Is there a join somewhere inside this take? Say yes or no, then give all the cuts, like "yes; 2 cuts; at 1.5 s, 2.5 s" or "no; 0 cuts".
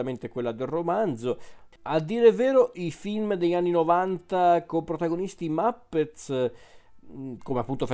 yes; 1 cut; at 1.7 s